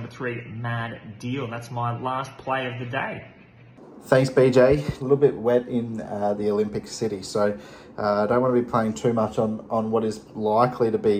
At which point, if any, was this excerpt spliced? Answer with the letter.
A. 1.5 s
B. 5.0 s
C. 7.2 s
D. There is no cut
B